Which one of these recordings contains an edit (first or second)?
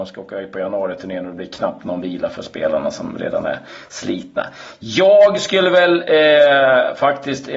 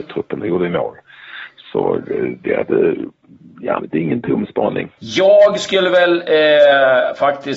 second